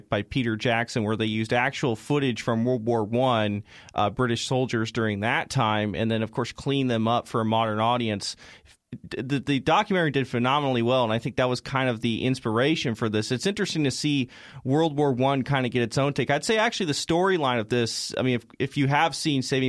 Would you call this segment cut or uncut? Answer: uncut